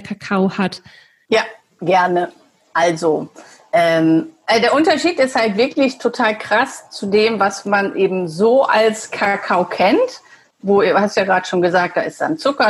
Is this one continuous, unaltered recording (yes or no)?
yes